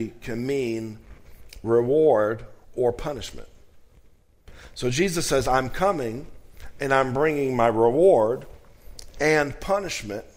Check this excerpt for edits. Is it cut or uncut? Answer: cut